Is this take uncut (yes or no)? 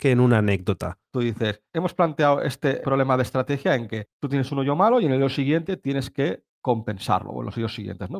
no